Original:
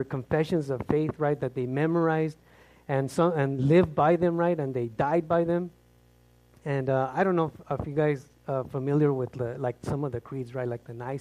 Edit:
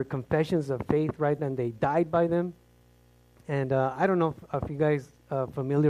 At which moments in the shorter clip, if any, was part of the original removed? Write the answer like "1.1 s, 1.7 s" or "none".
1.4 s